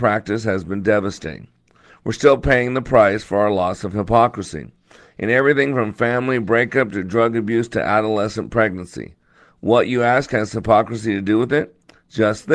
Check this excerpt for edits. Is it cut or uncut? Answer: uncut